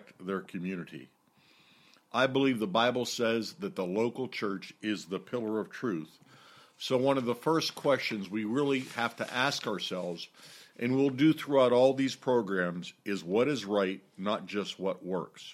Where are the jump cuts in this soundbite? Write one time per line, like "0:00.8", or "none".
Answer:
none